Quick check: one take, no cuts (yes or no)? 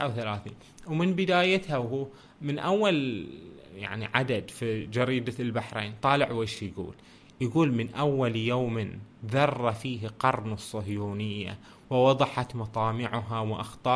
yes